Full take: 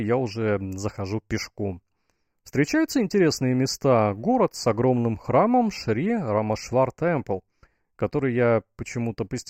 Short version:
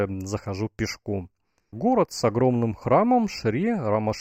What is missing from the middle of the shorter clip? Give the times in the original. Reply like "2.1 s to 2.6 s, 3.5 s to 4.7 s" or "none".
2.2 s to 4.2 s